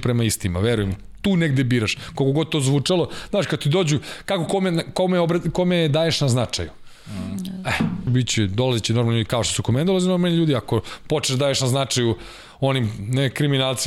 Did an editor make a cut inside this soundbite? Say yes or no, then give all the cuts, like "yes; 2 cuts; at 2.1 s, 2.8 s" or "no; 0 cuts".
yes; 1 cut; at 8.1 s